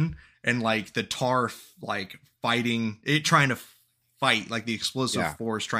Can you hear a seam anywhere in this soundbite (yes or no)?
no